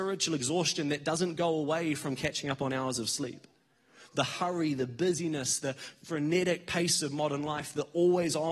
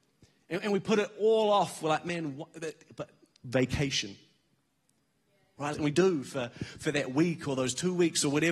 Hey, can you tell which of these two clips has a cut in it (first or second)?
second